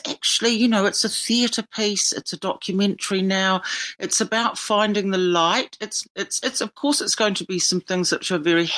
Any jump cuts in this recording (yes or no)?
no